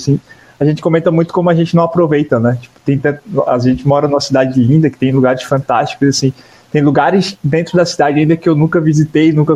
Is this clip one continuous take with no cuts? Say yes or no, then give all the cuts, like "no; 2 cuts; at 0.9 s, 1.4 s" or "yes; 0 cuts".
yes; 0 cuts